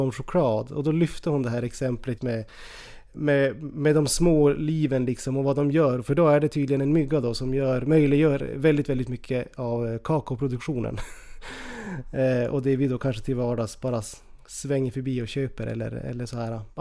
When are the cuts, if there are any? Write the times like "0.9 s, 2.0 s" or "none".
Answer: 2.2 s